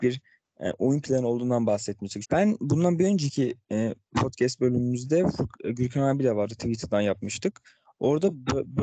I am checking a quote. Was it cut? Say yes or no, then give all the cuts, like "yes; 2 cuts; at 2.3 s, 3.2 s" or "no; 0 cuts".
yes; 1 cut; at 2.2 s